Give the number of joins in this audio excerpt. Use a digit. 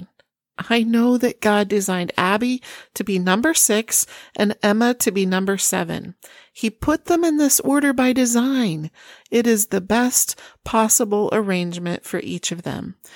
0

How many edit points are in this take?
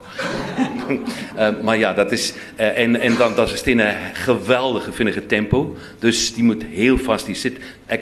0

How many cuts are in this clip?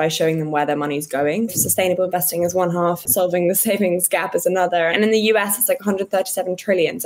3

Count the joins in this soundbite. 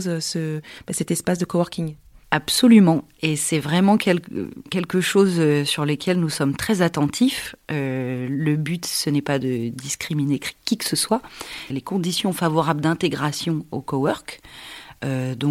1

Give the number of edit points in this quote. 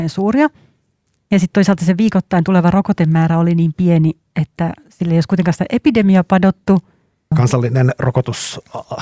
1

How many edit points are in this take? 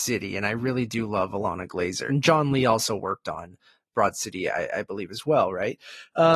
1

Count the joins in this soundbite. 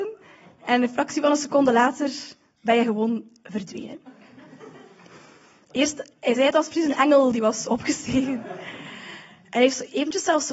0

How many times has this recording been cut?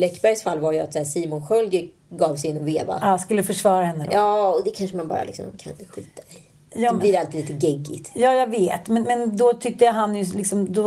1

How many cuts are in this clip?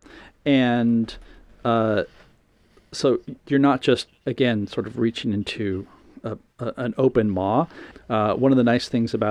1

